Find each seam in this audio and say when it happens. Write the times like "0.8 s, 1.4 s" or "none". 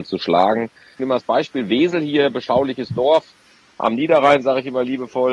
1.0 s